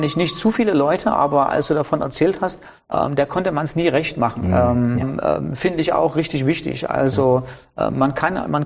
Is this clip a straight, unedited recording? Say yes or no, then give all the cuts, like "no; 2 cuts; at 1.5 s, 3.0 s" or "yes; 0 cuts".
no; 2 cuts; at 2.8 s, 5.0 s